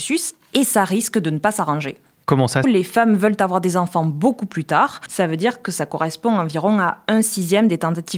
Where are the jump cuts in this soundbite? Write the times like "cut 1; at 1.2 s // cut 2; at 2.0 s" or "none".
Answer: cut 1; at 2.6 s // cut 2; at 5.1 s